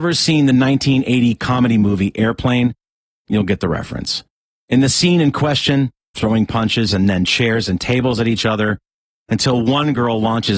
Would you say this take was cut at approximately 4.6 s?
no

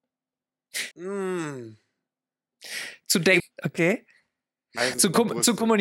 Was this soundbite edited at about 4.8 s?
no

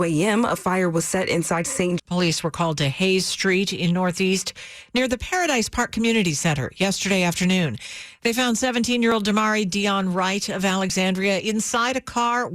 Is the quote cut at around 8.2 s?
no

